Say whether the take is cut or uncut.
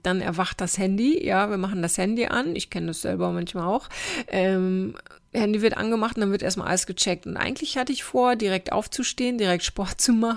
uncut